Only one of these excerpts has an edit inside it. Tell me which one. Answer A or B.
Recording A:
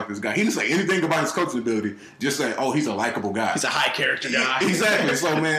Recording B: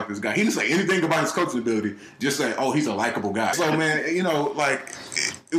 B